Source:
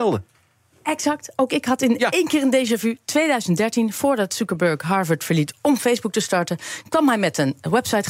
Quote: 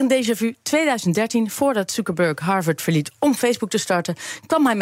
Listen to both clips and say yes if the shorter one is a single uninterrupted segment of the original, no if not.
yes